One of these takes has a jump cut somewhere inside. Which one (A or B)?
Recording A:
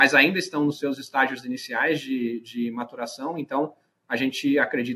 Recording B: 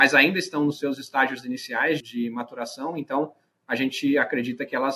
B